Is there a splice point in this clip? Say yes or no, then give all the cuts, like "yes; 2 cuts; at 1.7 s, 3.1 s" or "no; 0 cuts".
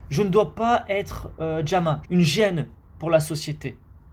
yes; 1 cut; at 2.0 s